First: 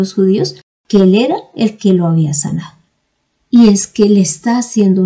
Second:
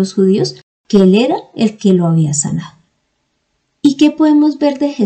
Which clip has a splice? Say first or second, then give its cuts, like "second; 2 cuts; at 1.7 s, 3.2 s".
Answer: first; 1 cut; at 3.4 s